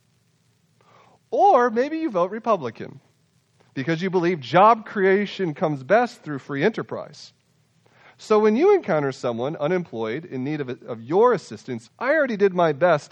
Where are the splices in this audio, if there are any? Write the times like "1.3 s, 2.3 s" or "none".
11.9 s